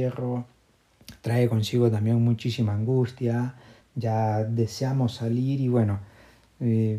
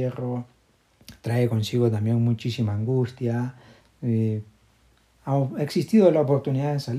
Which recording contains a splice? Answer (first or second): second